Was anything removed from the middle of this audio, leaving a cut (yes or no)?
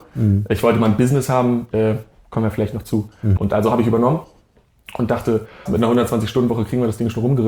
yes